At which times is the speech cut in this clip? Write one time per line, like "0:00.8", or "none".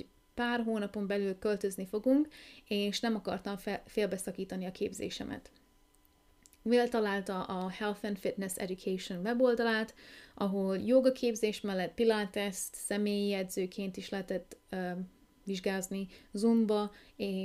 none